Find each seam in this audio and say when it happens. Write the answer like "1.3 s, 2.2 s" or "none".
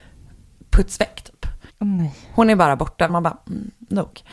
1.7 s, 3.1 s